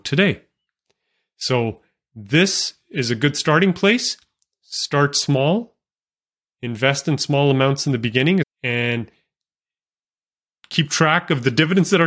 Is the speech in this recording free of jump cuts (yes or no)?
no